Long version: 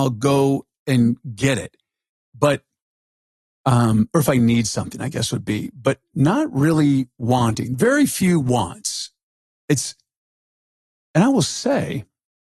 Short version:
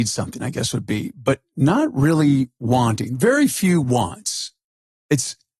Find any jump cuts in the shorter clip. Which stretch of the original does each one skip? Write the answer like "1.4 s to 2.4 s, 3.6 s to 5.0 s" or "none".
none